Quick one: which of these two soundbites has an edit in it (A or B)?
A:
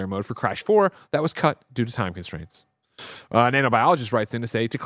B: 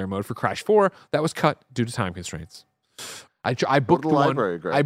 B